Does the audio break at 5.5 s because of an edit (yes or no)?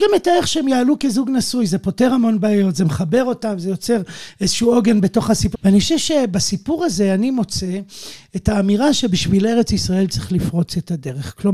yes